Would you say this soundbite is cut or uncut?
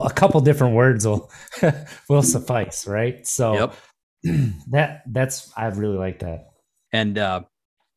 cut